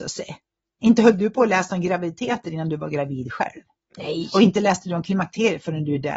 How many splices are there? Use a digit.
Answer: 0